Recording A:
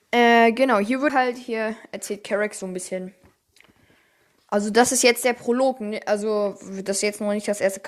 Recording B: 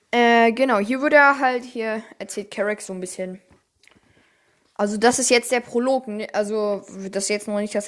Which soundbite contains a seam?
A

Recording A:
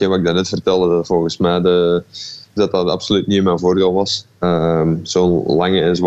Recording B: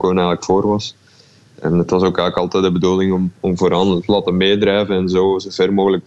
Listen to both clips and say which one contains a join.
A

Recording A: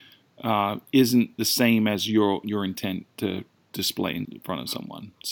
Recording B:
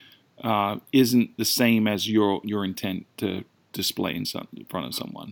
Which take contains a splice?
A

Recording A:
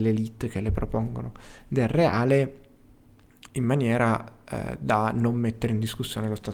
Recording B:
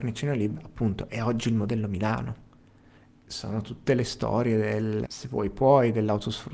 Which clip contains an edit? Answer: B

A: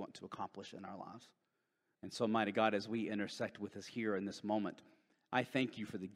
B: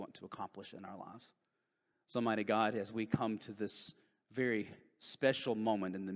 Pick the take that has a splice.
A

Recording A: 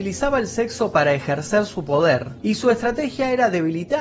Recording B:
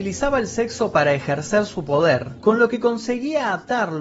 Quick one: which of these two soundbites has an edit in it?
B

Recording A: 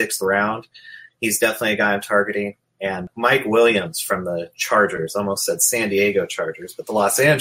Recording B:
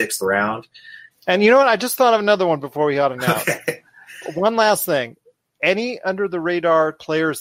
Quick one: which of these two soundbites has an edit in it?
B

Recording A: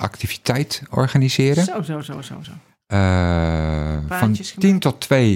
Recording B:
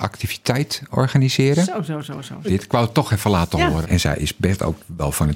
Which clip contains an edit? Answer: B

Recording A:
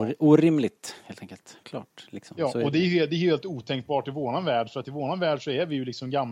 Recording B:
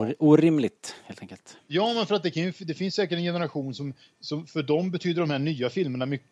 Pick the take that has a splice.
A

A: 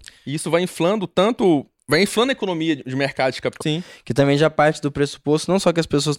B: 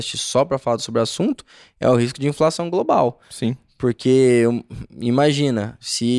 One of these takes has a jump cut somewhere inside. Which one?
A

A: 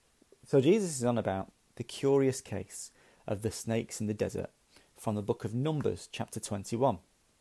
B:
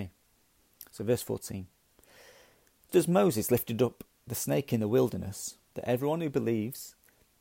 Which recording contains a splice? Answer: B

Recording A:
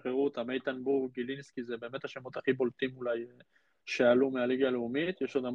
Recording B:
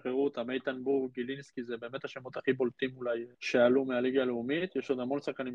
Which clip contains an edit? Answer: B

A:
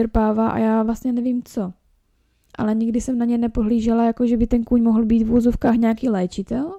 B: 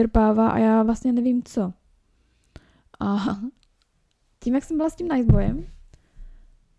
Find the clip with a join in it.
A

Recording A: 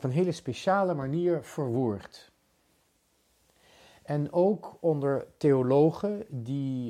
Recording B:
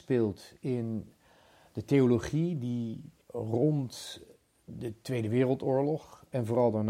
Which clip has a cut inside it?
B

